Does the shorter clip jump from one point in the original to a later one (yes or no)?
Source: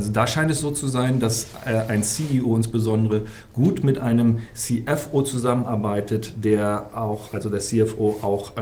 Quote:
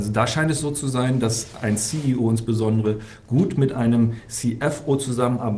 yes